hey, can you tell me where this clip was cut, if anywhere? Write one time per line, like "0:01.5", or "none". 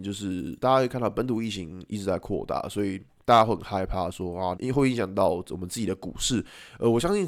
0:04.6